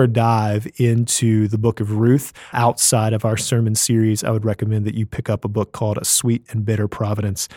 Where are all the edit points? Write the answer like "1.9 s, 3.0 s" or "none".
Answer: 2.5 s